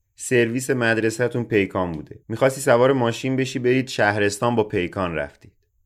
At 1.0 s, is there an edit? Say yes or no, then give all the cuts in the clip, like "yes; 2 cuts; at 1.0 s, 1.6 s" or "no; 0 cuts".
no; 1 cut; at 2.2 s